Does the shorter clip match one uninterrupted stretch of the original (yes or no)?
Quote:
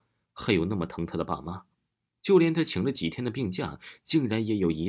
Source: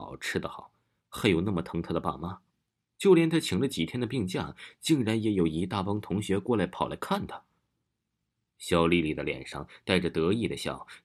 yes